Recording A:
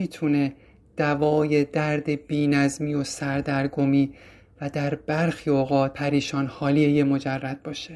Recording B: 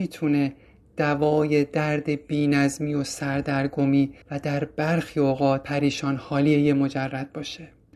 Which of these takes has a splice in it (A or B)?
B